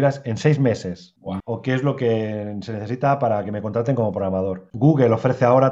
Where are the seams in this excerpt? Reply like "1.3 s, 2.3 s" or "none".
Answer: 1.4 s, 4.7 s

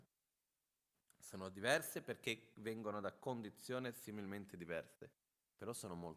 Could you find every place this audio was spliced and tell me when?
1.1 s

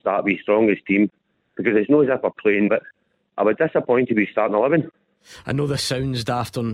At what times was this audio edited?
2.7 s

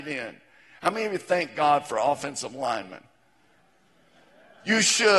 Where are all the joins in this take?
none

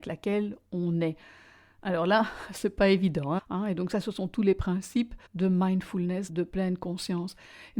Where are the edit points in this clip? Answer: 3.4 s, 5.3 s, 6.3 s

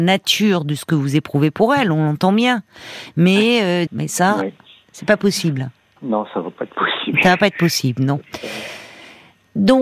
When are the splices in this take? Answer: 3.9 s

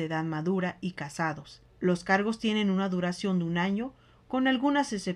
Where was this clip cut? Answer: 1.6 s

